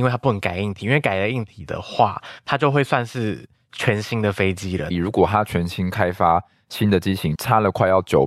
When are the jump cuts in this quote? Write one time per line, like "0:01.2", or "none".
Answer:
0:04.9
0:07.4